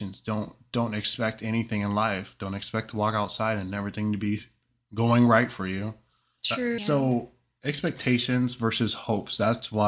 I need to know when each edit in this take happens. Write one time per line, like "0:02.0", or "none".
0:06.8